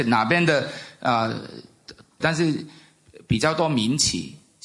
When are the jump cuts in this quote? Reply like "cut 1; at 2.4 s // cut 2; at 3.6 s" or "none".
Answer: cut 1; at 2.2 s